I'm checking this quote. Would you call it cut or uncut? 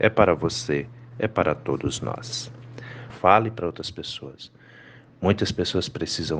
cut